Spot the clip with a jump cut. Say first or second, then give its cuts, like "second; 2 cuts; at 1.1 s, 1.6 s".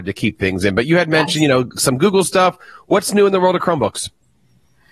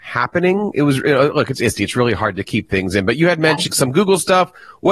second; 1 cut; at 3.7 s